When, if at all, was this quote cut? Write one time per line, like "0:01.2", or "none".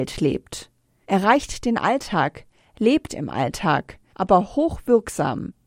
0:04.1

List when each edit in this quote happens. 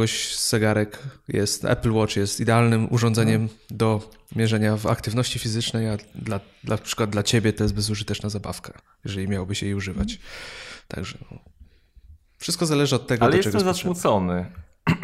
none

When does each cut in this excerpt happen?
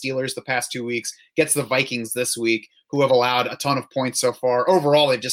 none

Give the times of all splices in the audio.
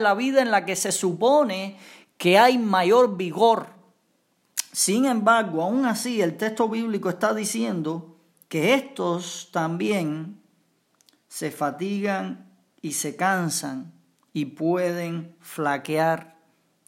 none

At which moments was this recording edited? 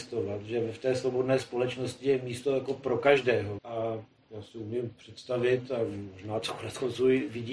0:03.6

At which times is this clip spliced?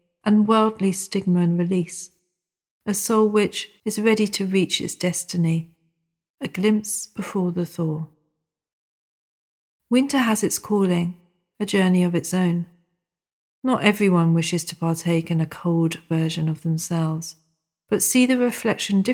0:03.8

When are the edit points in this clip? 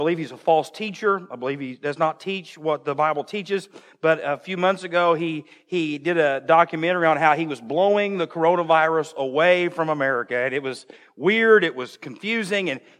none

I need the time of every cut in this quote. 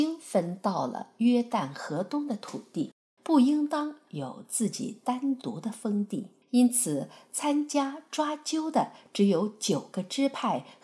0:03.2
0:06.4

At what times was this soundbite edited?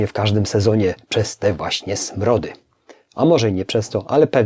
none

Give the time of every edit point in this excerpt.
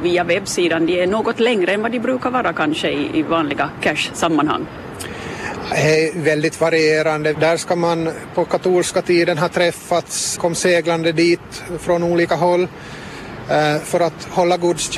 0:07.3
0:10.4

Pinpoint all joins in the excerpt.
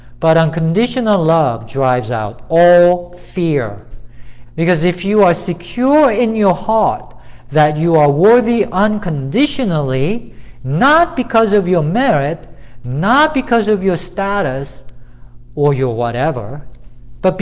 0:04.5

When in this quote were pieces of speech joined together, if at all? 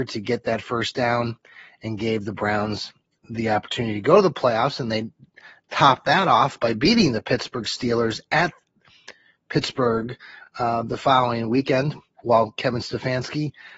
none

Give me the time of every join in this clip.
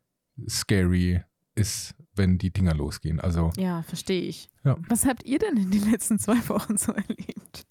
0:04.5

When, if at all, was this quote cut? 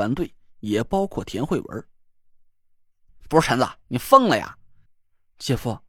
0:04.9

